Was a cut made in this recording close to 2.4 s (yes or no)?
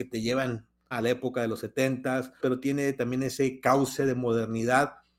yes